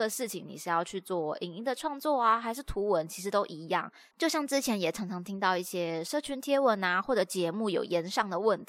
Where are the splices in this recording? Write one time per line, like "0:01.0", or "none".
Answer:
0:04.1